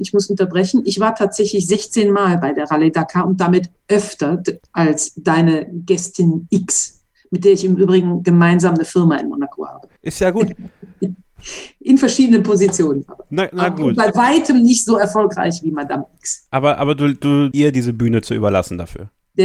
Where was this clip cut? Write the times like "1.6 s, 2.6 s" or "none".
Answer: 10.0 s, 17.5 s